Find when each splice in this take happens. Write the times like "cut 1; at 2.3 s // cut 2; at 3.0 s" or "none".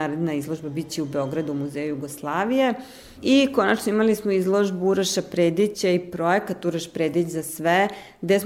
cut 1; at 3.2 s

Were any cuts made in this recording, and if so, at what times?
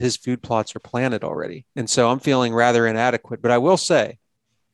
cut 1; at 1.7 s

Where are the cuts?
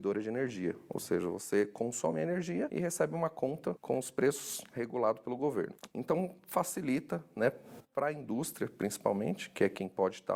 cut 1; at 5.9 s

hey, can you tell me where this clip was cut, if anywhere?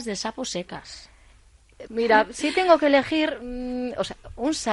cut 1; at 1.9 s

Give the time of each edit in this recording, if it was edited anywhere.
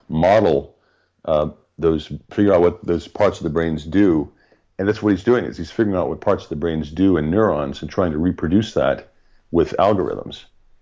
none

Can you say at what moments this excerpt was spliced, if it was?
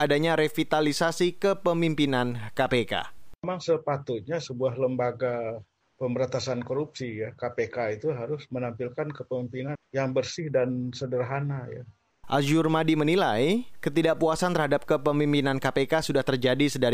cut 1; at 9.7 s // cut 2; at 12.2 s

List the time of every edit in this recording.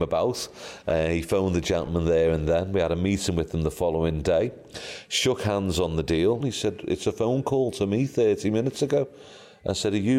cut 1; at 6.4 s

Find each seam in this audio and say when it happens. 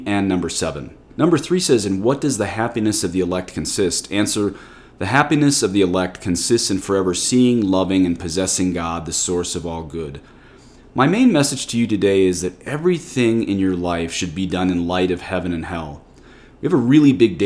cut 1; at 1.0 s

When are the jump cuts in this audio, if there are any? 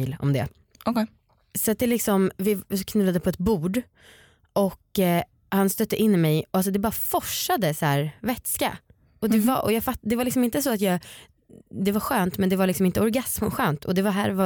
none

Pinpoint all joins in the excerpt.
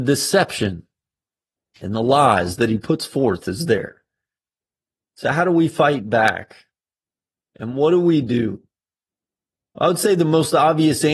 none

